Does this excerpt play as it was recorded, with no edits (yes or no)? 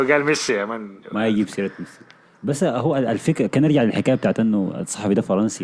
yes